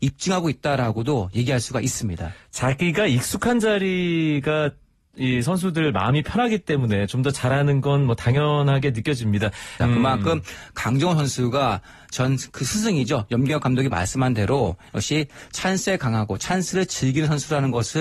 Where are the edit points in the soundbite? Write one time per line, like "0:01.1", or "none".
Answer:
0:09.8